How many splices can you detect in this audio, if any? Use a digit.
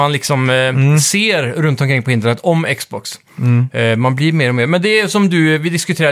0